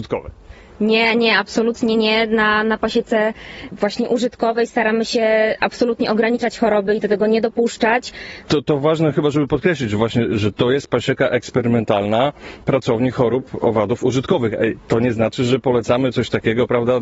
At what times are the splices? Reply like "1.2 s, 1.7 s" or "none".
8.4 s